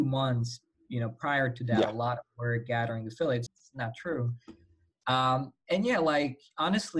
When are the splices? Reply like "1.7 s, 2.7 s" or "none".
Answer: 3.5 s